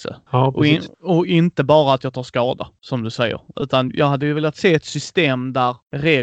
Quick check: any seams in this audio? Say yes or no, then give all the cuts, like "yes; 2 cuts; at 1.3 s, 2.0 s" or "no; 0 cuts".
no; 0 cuts